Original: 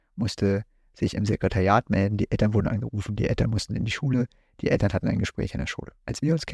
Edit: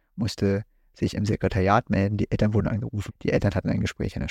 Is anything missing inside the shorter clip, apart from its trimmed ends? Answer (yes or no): yes